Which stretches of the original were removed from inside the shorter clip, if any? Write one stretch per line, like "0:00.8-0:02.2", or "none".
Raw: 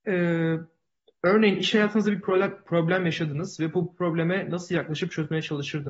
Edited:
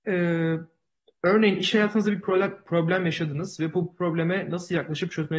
none